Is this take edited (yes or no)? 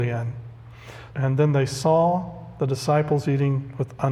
yes